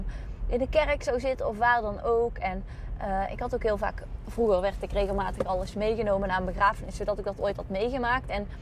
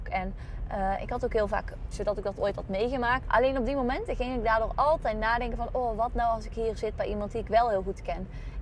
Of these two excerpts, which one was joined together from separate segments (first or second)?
second